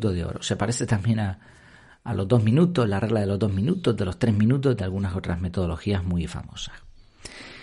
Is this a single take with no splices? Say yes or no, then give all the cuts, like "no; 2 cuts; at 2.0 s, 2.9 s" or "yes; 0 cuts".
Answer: yes; 0 cuts